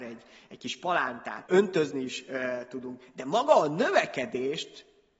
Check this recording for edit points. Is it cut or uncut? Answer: cut